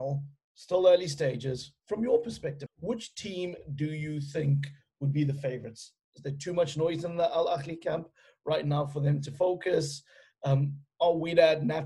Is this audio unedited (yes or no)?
no